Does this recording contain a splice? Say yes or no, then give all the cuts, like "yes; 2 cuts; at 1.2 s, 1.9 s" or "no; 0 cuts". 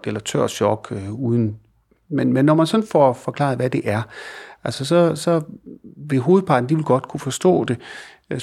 no; 0 cuts